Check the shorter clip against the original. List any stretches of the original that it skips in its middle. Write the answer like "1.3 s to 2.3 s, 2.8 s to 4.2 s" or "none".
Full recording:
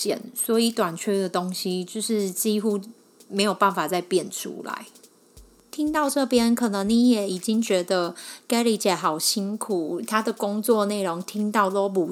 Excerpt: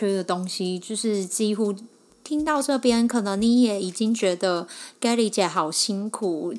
3.2 s to 5.6 s